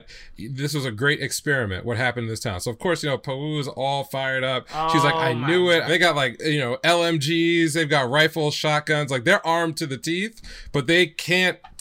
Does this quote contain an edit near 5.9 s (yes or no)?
yes